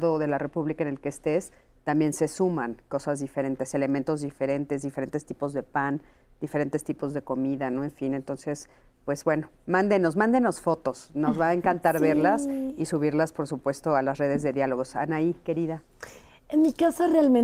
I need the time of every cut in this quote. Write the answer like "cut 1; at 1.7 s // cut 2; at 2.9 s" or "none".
none